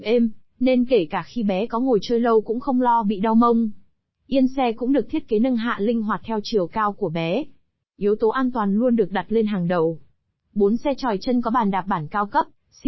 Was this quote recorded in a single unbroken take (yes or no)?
no